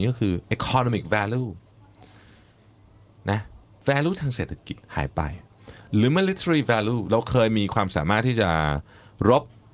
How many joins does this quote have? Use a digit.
0